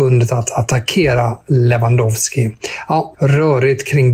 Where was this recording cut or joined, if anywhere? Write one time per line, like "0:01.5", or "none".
0:03.1

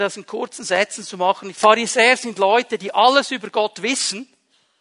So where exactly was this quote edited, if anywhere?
0:01.5

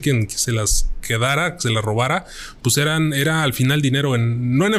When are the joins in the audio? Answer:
none

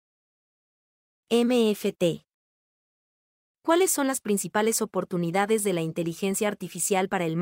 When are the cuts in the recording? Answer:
none

